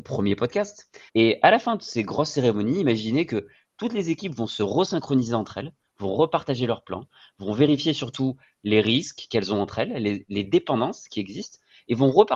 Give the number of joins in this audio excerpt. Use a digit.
1